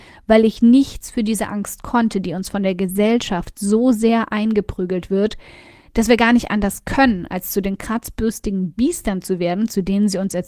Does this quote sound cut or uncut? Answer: uncut